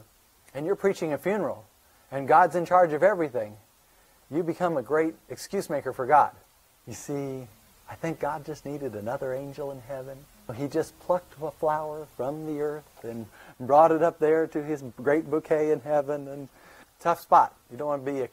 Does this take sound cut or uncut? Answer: uncut